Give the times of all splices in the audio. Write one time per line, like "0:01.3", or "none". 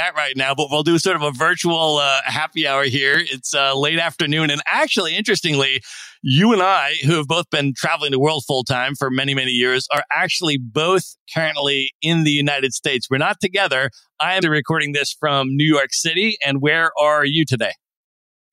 0:14.4